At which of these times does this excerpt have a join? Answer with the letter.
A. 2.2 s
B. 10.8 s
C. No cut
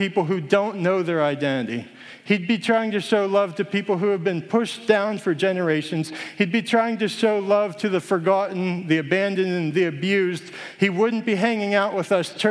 C